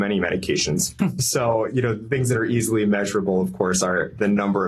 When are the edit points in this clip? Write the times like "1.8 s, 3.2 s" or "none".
1.0 s